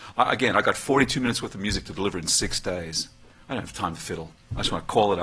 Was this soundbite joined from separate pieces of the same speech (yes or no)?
no